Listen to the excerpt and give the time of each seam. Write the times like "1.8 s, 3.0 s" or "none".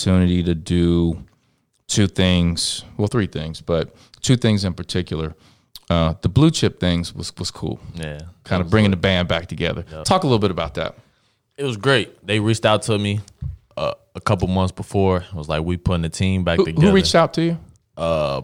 none